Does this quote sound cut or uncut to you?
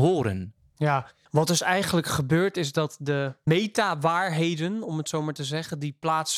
uncut